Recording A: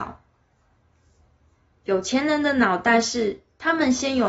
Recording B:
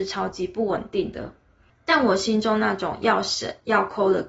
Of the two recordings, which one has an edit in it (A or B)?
B